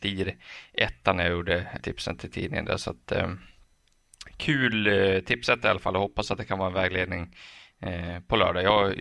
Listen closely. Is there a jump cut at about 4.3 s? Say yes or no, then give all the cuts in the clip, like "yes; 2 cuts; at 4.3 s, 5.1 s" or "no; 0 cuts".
no; 1 cut; at 1.8 s